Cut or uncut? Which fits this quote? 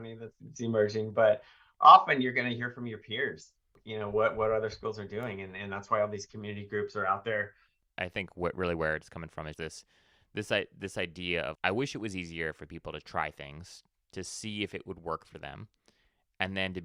cut